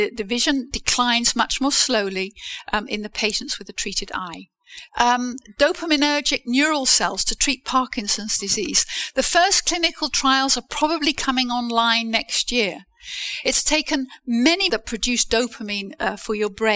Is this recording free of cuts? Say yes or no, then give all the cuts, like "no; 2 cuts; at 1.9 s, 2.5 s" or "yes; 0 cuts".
no; 2 cuts; at 4.9 s, 14.7 s